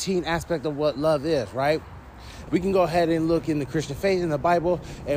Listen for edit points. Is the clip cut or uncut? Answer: cut